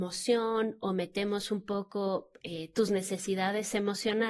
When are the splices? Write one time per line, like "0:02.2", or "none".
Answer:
none